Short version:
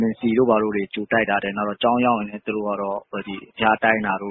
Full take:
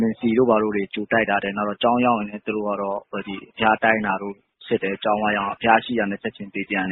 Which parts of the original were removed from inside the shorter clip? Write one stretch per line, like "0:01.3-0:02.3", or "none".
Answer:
none